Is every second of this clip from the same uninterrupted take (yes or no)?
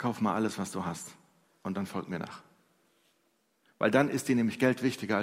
yes